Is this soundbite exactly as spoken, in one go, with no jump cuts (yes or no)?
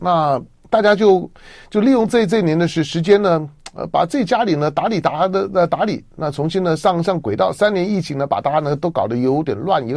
yes